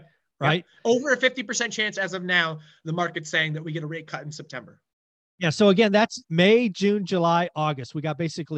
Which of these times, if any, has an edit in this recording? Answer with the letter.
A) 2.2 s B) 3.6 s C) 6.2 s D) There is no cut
C